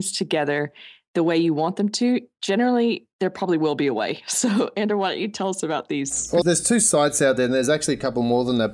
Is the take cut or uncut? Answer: cut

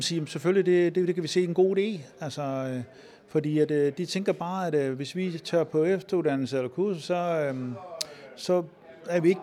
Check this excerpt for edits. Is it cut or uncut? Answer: uncut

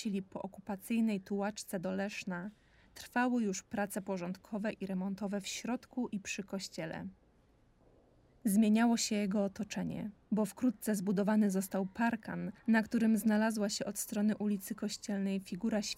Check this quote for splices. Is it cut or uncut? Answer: uncut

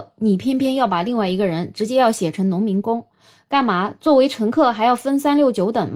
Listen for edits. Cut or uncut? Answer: uncut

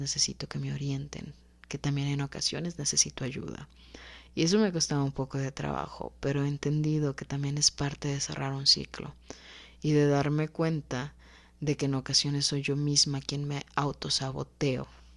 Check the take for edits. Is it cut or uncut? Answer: uncut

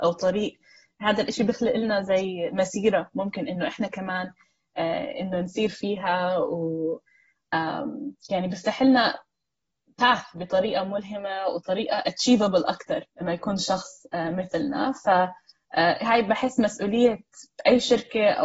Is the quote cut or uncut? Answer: cut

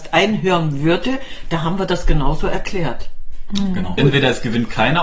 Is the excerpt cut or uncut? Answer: cut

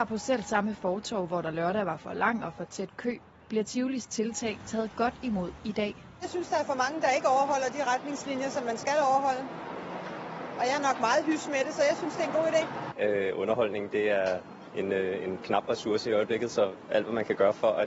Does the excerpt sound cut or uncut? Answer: cut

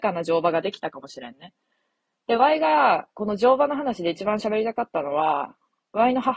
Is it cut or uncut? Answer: uncut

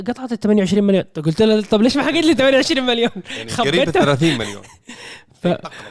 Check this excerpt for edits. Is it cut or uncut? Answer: uncut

